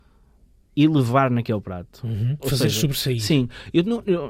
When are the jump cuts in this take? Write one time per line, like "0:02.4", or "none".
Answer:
0:02.4